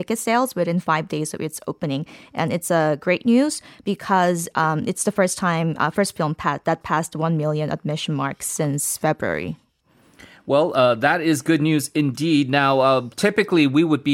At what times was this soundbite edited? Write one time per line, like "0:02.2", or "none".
none